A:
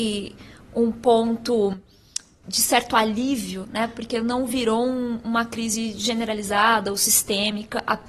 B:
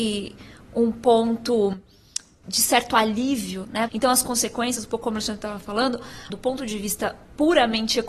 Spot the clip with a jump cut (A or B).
B